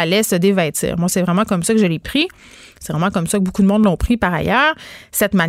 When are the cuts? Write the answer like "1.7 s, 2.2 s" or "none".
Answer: none